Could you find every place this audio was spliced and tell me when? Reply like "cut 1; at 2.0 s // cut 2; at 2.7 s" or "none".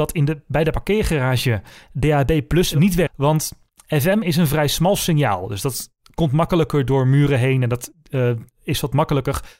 cut 1; at 3.1 s